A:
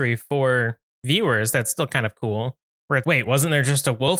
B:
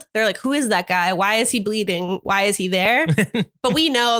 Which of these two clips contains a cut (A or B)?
A